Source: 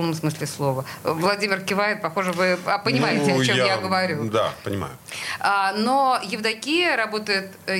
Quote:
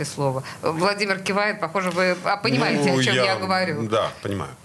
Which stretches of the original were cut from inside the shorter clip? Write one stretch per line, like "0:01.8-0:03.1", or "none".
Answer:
none